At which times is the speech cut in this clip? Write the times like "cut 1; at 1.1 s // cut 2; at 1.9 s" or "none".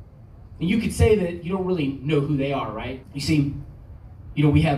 cut 1; at 3.0 s